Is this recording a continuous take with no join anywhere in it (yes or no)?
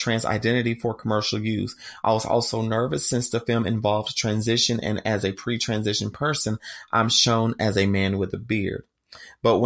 yes